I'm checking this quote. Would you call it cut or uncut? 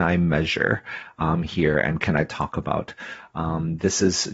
uncut